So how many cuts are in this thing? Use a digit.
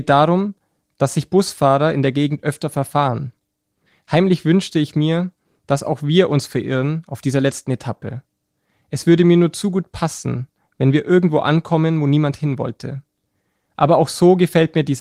0